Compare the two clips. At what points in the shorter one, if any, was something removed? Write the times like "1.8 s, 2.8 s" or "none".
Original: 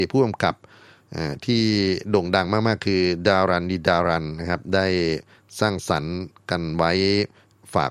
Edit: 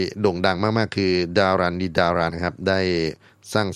2.3 s